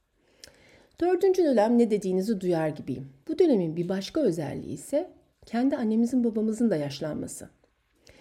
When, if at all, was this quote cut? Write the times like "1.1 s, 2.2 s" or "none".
3.2 s